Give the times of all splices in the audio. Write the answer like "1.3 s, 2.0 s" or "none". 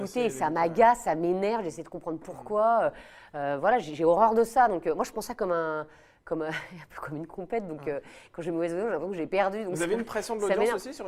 none